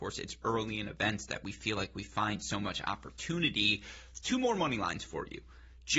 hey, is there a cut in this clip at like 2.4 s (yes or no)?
no